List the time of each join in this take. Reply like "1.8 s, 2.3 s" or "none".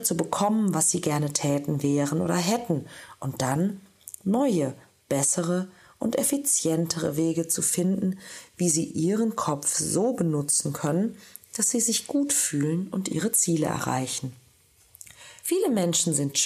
15.4 s